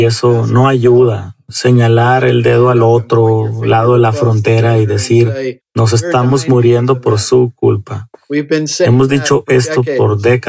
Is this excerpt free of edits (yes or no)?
no